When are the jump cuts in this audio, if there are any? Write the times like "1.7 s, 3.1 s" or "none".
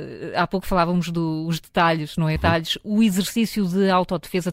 2.4 s